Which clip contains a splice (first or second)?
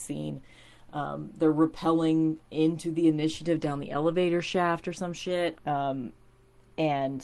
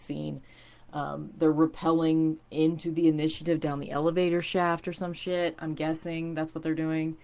first